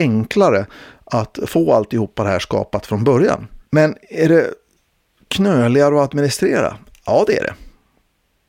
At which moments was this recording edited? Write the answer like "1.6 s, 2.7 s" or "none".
3.7 s